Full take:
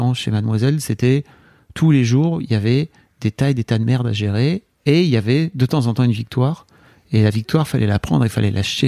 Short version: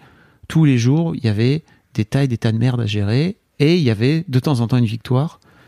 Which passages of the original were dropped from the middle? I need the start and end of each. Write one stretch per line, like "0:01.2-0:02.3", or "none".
none